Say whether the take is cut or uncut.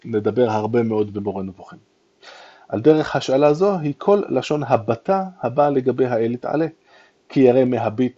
uncut